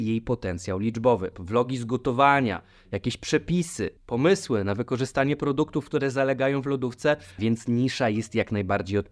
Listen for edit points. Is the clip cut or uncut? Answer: cut